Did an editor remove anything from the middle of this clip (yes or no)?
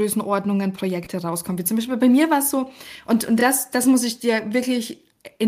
no